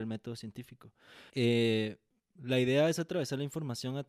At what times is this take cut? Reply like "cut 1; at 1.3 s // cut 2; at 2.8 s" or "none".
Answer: cut 1; at 1.3 s